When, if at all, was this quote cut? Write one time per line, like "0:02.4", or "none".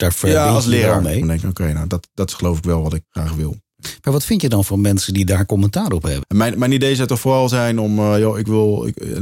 0:01.2
0:03.0
0:06.2